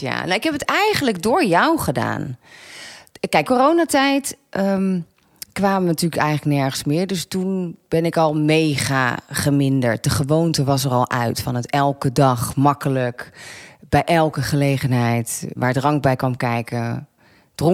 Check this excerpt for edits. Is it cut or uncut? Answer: cut